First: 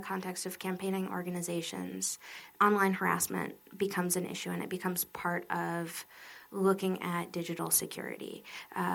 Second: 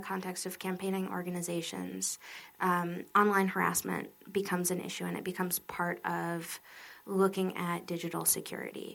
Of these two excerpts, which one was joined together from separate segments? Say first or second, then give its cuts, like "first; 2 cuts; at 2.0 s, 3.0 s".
first; 1 cut; at 2.6 s